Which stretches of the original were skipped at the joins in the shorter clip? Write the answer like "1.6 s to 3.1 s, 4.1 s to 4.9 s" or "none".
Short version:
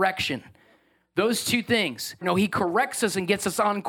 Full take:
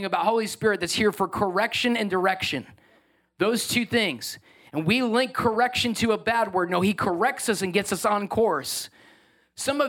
4.4 s to 6.7 s